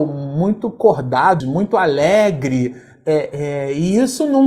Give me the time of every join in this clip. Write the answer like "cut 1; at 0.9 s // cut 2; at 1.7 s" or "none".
cut 1; at 1.4 s

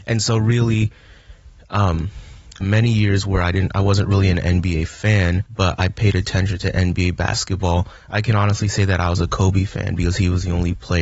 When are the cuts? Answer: cut 1; at 2.6 s // cut 2; at 5.5 s

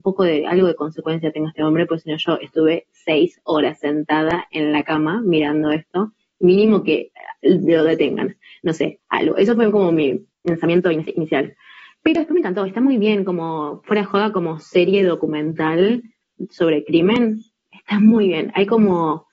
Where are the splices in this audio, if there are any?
none

